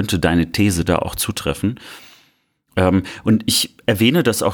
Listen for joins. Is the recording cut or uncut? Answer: uncut